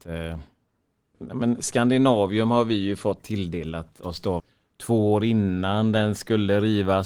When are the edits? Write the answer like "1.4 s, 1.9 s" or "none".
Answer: 1.1 s, 4.4 s